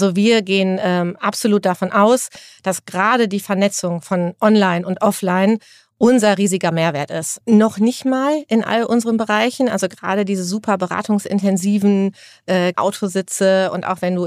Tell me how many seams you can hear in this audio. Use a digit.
2